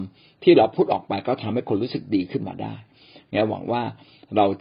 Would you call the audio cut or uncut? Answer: uncut